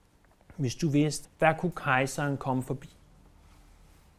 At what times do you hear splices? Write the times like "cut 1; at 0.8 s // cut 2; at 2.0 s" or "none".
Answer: cut 1; at 1.2 s